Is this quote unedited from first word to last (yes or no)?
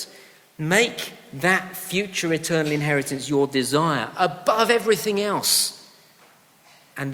yes